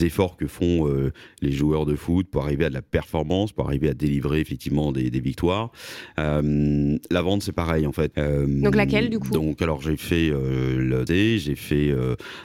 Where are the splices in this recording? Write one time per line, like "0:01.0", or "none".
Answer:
0:08.1
0:11.1